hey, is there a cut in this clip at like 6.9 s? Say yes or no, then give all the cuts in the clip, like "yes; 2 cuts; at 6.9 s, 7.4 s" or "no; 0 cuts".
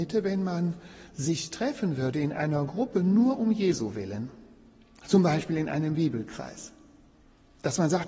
no; 0 cuts